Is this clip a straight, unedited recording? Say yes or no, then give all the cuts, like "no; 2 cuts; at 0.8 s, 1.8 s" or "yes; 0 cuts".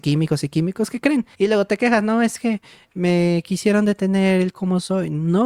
no; 1 cut; at 1.3 s